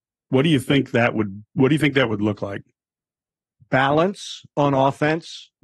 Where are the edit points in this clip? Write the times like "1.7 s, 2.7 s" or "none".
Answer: none